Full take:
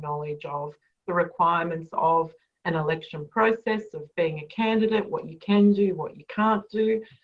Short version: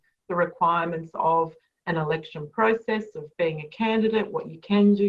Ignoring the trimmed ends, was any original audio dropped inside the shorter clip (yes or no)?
no